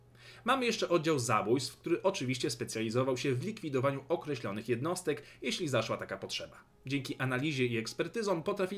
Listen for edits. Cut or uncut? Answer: uncut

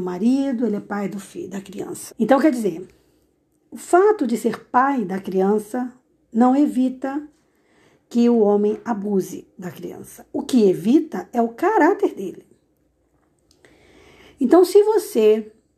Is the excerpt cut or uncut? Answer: cut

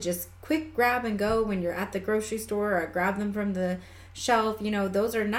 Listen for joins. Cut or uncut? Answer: uncut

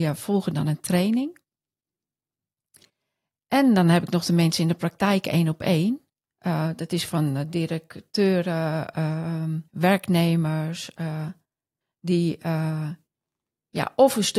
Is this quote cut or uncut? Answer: cut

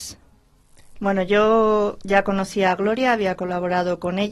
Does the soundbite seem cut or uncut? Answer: cut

